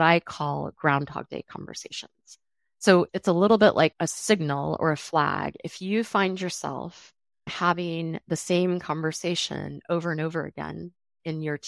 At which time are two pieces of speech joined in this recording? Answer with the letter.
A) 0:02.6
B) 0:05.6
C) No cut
C